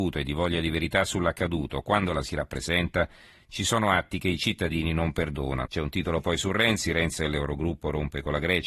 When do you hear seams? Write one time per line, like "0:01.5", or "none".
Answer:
0:05.7
0:07.2